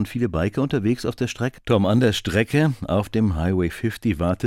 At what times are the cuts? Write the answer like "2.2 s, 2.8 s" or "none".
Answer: 1.6 s